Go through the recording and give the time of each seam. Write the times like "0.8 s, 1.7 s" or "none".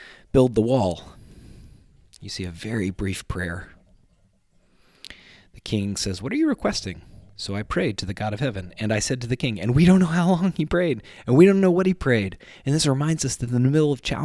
none